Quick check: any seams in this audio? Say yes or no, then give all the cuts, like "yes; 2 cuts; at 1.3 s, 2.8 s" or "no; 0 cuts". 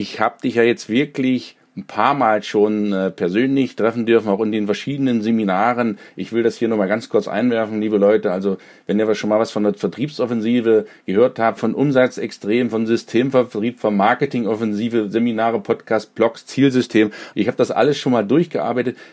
yes; 2 cuts; at 11.6 s, 17.3 s